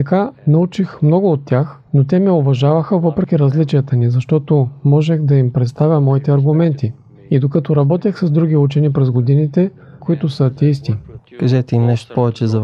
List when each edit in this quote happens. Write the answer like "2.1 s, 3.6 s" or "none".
10.0 s, 11.2 s